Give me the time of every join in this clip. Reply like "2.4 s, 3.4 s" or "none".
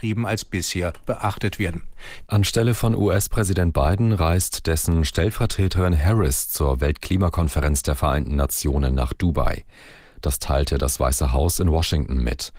2.3 s